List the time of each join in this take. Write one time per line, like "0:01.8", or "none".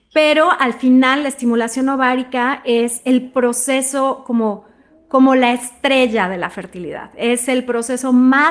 none